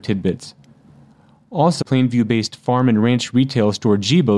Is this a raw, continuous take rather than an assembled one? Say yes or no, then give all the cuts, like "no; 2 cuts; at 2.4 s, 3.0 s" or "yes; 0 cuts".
no; 1 cut; at 1.8 s